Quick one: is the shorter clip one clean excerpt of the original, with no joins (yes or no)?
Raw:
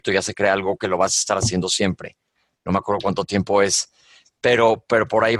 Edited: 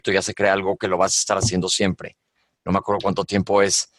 yes